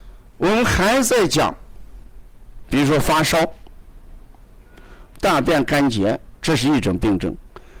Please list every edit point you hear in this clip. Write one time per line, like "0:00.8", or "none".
0:02.6
0:05.1
0:06.4